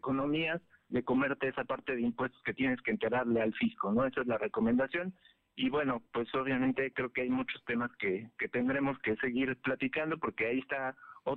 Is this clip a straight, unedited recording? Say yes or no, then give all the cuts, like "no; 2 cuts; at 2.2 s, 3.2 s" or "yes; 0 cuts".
no; 1 cut; at 0.9 s